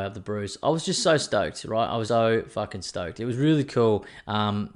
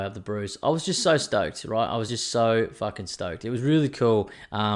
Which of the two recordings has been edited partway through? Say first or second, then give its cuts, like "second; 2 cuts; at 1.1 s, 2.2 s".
first; 1 cut; at 2.1 s